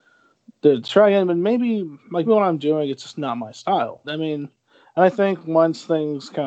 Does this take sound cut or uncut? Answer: cut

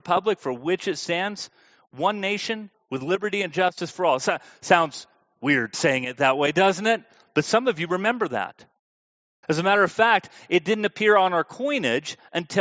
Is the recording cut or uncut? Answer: cut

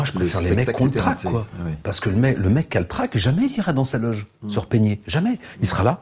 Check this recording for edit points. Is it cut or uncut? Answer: uncut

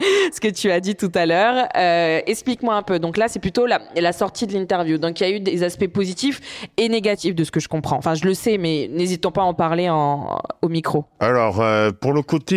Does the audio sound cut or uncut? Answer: uncut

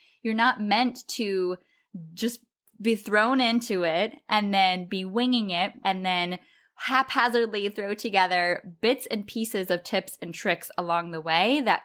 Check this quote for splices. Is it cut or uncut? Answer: cut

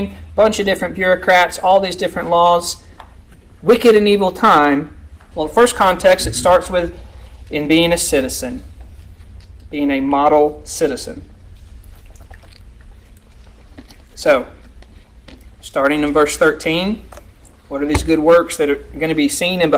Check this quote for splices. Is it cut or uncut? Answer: cut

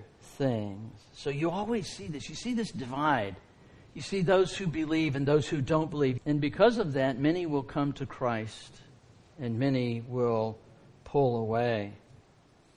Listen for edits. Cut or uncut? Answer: cut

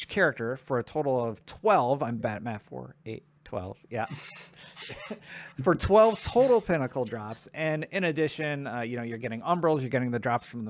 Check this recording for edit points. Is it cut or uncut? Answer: cut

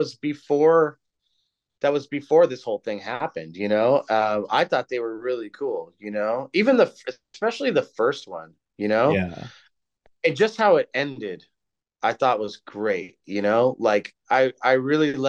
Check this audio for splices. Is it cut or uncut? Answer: uncut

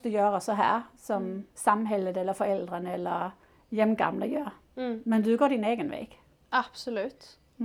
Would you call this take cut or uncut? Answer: uncut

